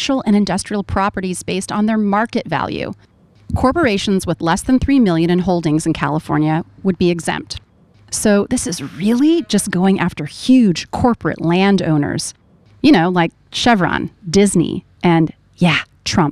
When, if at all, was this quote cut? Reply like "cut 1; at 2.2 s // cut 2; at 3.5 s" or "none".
cut 1; at 7.9 s